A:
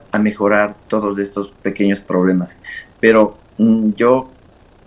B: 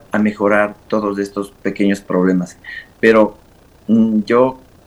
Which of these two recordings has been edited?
A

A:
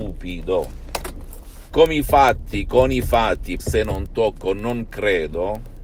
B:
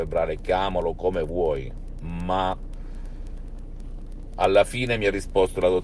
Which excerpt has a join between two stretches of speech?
A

